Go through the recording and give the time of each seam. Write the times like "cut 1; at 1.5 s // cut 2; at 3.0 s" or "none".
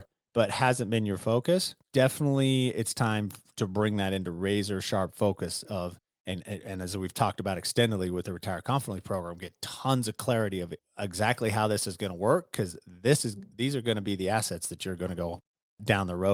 none